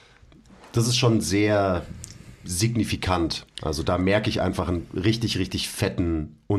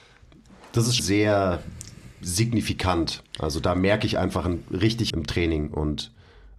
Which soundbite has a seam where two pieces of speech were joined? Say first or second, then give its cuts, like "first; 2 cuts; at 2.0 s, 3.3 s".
second; 2 cuts; at 1.0 s, 5.1 s